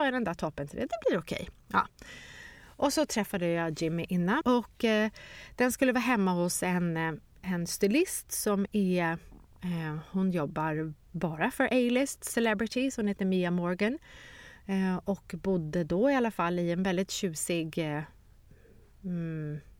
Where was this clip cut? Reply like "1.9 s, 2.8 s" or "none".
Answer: 4.4 s